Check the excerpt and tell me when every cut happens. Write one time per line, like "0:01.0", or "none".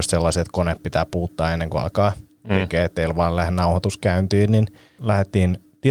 0:05.0